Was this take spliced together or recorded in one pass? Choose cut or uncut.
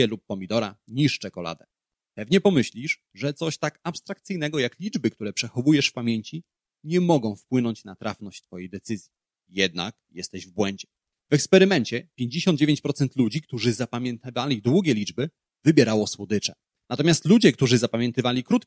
uncut